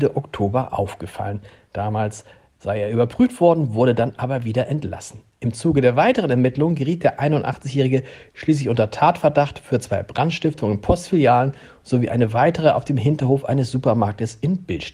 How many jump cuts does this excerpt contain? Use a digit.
0